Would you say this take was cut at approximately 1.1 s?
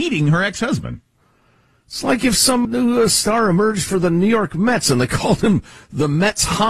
no; 1 cut; at 2.6 s

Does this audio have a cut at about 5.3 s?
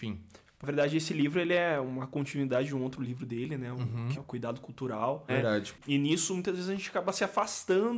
yes; 2 cuts; at 4.1 s, 5.3 s

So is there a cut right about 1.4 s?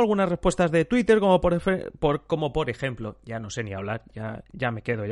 no; 0 cuts

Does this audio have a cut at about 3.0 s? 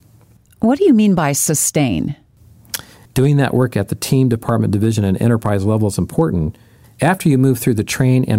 yes; 2 cuts; at 3.0 s, 6.8 s

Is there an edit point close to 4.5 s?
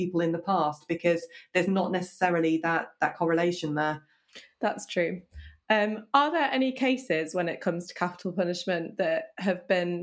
no; 0 cuts

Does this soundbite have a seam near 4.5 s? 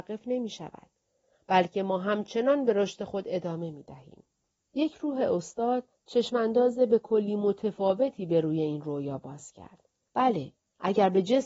yes; 2 cuts; at 4.5 s, 10.1 s

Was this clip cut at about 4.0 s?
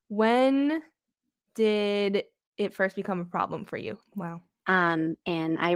yes; 1 cut; at 4.0 s

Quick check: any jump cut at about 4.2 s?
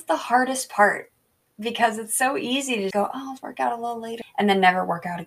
yes; 2 cuts; at 2.9 s, 4.2 s

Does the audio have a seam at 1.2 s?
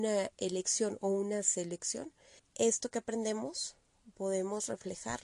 no; 1 cut; at 2.4 s

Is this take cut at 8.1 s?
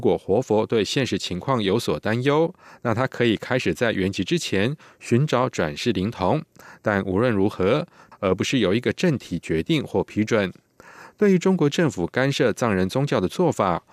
yes; 1 cut; at 8.1 s

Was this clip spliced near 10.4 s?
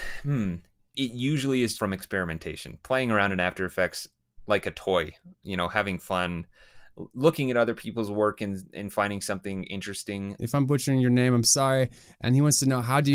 yes; 2 cuts; at 1.7 s, 10.4 s

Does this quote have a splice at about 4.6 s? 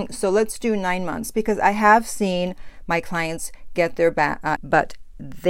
yes; 1 cut; at 4.6 s

